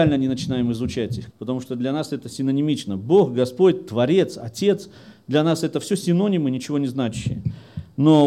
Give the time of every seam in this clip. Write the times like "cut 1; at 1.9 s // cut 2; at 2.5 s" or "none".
cut 1; at 1.3 s